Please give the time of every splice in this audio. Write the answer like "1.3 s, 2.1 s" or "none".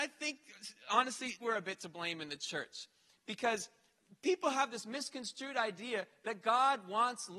1.4 s